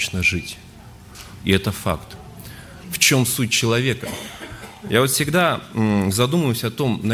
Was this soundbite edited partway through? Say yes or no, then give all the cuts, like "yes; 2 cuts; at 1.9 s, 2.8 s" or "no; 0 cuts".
yes; 2 cuts; at 1.4 s, 2.8 s